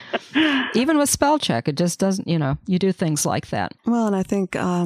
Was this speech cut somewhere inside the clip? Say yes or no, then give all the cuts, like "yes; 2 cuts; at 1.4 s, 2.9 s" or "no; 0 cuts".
yes; 1 cut; at 3.8 s